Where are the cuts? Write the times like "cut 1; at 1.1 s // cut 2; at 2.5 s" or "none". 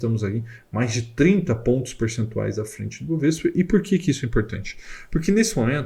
none